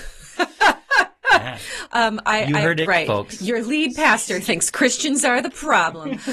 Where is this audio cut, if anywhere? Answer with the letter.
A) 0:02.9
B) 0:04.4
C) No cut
A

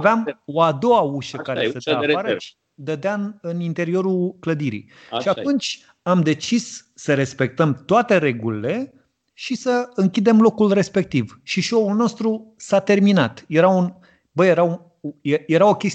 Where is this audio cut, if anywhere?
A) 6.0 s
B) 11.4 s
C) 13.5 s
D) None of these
D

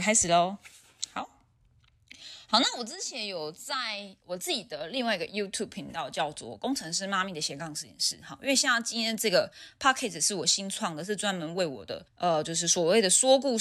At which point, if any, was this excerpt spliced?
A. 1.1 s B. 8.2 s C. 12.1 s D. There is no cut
C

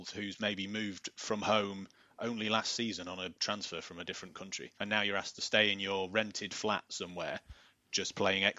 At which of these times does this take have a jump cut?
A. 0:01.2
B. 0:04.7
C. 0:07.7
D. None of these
B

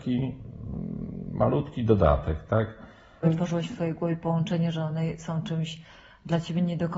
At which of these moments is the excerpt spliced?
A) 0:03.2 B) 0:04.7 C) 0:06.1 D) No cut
A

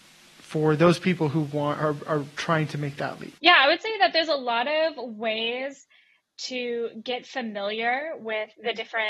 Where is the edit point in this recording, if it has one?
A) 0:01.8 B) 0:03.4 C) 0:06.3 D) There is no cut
B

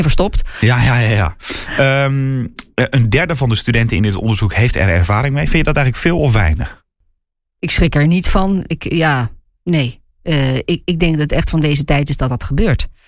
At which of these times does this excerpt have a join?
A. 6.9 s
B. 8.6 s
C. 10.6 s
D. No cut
D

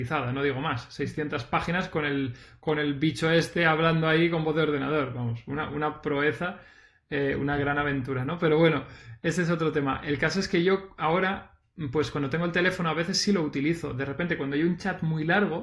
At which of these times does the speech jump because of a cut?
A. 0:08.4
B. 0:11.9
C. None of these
C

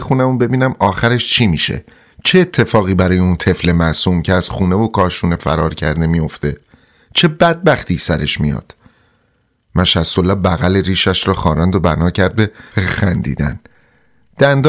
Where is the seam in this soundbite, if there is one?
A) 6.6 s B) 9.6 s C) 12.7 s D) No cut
C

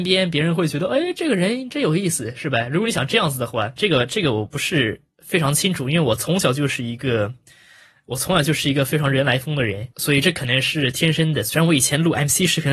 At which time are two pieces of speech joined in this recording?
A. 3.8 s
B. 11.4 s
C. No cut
A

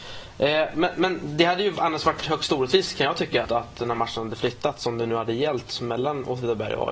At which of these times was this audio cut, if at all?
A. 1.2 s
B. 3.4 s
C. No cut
B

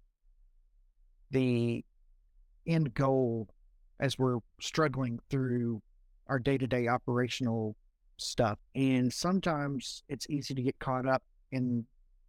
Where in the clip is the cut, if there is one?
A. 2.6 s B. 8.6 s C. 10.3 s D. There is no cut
B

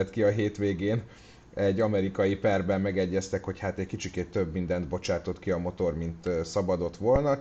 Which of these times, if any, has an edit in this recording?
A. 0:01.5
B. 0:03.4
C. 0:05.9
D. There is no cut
D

